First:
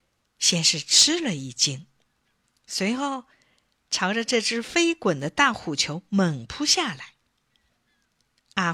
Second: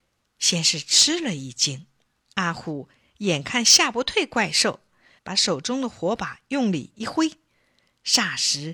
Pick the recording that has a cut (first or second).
second